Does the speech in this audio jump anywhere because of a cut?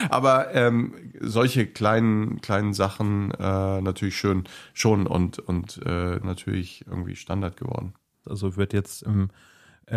yes; 2 cuts; at 6.2 s, 8.2 s

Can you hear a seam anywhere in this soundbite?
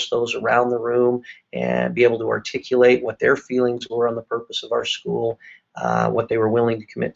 no; 0 cuts

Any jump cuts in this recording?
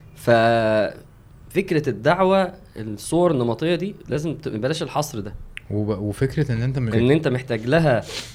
yes; 2 cuts; at 4.0 s, 6.9 s

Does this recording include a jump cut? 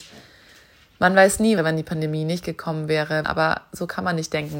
yes; 2 cuts; at 1.6 s, 3.2 s

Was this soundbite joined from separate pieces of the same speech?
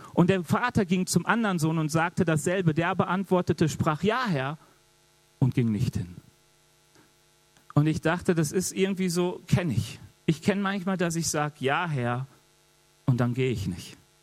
no; 0 cuts

